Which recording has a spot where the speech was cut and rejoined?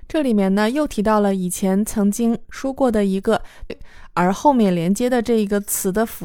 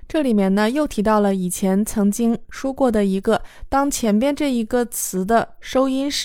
first; 1 cut; at 3.7 s

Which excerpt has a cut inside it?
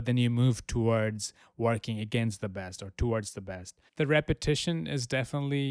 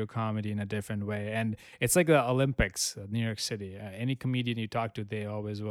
first; 1 cut; at 3.9 s

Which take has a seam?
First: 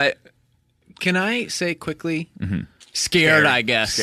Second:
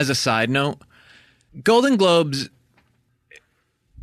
first; 1 cut; at 2.8 s

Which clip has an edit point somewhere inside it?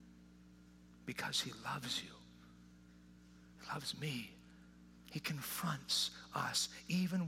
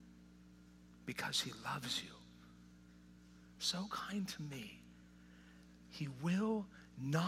second; 1 cut; at 3.5 s

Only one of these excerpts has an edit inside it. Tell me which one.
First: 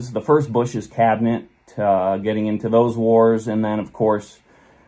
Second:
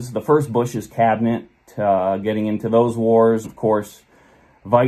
second; 1 cut; at 3.4 s

